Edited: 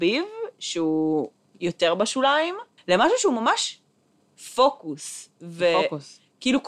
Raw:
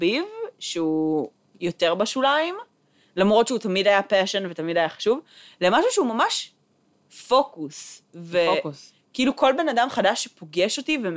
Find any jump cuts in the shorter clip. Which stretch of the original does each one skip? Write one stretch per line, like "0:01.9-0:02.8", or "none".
0:02.8-0:05.5